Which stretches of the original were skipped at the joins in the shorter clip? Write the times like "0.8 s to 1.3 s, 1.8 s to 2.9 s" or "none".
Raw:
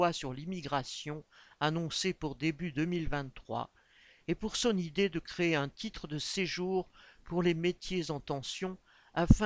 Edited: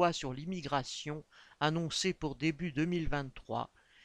none